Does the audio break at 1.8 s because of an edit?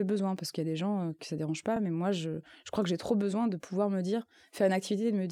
no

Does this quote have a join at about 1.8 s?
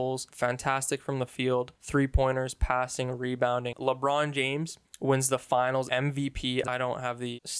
no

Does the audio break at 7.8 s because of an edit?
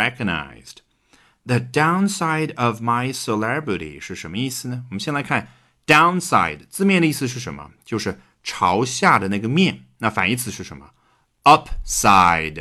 no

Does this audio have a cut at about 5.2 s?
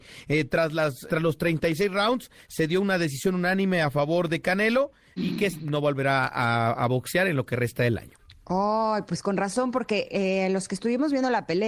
yes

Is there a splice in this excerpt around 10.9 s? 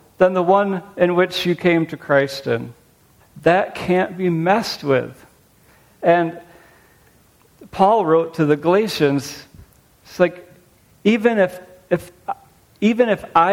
no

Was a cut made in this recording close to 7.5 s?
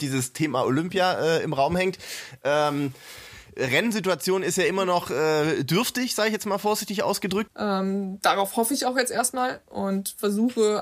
yes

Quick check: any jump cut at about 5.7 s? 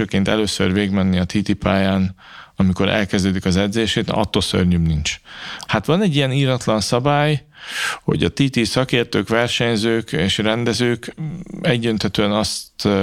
yes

